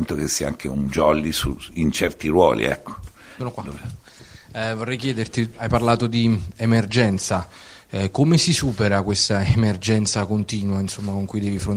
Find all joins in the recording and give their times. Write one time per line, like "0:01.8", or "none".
0:03.4